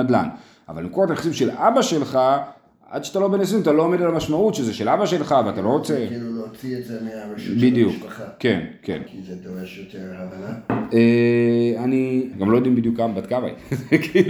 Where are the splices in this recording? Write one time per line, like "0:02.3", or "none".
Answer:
0:09.1
0:12.3